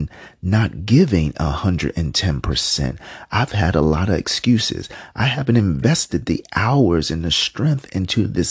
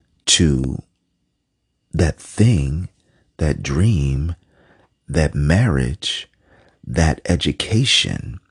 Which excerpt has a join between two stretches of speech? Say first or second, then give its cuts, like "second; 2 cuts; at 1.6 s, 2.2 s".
first; 1 cut; at 5.1 s